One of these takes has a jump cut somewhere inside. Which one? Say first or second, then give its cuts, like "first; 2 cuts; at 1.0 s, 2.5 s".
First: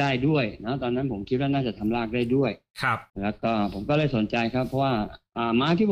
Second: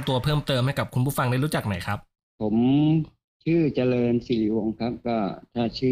first; 1 cut; at 3.1 s